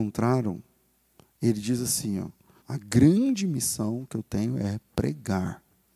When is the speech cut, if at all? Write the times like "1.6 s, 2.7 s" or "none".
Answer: 2.6 s

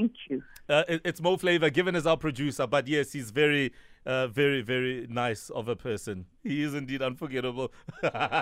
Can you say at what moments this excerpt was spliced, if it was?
none

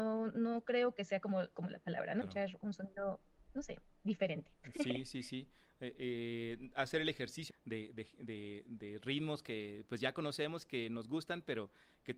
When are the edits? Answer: 2.2 s, 7.5 s

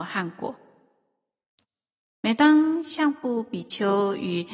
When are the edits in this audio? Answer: none

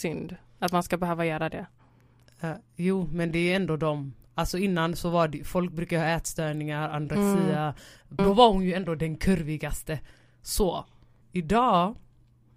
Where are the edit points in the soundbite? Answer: 8.2 s, 11.2 s

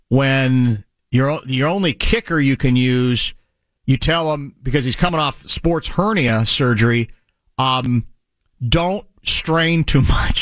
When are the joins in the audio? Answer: none

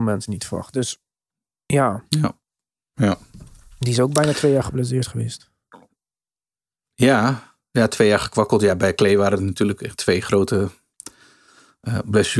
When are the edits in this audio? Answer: none

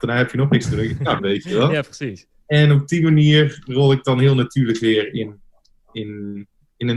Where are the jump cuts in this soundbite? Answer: 1.2 s

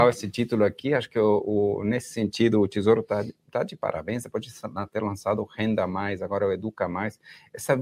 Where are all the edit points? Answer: none

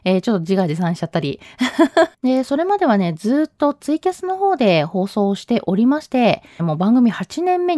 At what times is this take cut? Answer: 2.1 s, 6.6 s

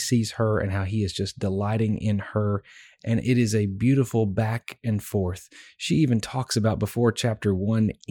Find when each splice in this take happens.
none

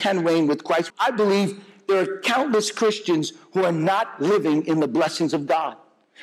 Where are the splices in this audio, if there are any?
0.9 s

